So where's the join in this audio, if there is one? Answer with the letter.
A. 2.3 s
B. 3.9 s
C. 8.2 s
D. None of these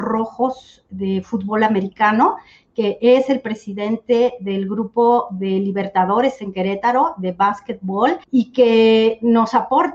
C